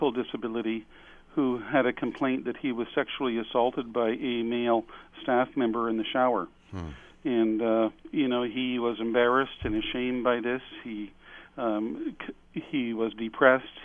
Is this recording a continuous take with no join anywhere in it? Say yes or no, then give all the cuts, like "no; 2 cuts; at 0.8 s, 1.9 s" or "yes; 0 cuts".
no; 1 cut; at 8.0 s